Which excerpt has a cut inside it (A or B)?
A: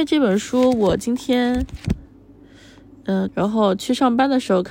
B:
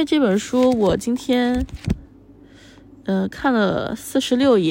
A